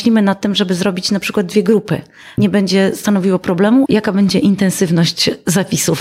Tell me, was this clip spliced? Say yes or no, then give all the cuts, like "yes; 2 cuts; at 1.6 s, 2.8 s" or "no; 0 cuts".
yes; 2 cuts; at 2.4 s, 3.9 s